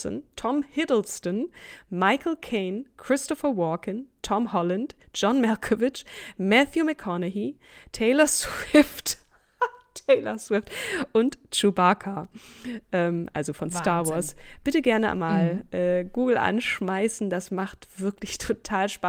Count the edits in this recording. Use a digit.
0